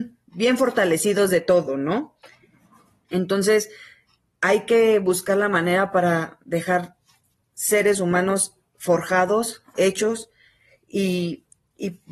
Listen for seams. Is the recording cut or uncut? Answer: cut